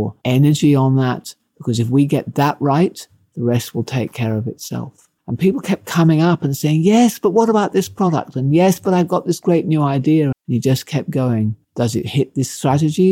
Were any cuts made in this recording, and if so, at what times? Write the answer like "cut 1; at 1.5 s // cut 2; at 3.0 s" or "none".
cut 1; at 5.2 s // cut 2; at 10.3 s // cut 3; at 11.6 s